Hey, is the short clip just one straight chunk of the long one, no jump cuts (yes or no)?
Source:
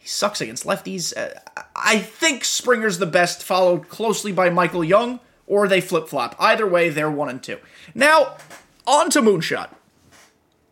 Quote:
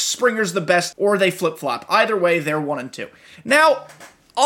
no